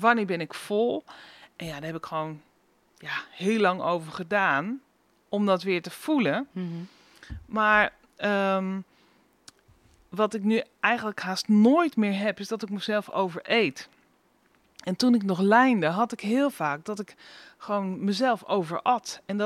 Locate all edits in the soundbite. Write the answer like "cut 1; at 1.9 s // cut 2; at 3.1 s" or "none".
none